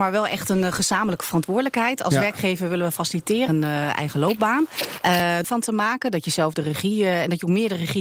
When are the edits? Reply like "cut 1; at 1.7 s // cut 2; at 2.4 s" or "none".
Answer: cut 1; at 3.5 s // cut 2; at 5.4 s